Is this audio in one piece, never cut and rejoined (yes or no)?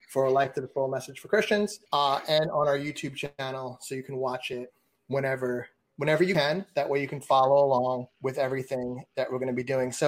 no